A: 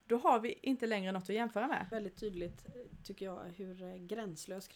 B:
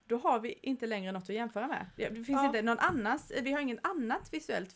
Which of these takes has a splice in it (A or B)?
A